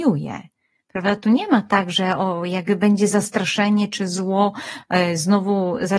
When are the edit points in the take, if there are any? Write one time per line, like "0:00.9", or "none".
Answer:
none